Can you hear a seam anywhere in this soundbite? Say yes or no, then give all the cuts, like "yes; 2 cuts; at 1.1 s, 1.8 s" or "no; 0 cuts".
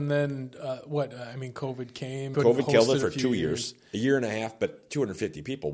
yes; 1 cut; at 2.3 s